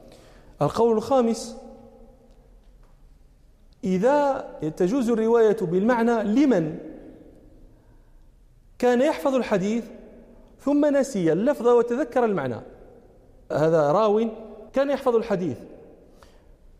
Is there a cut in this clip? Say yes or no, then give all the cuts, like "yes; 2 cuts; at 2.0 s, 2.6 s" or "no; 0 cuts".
yes; 2 cuts; at 13.5 s, 14.7 s